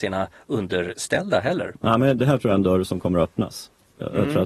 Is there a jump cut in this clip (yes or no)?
yes